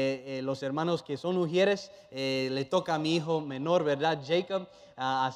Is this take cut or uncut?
uncut